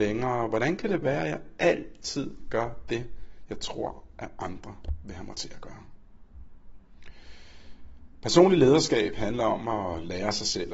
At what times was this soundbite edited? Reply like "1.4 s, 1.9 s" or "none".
none